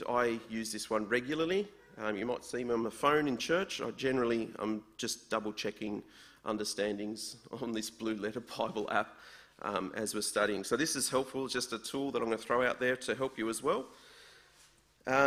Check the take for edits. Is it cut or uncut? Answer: uncut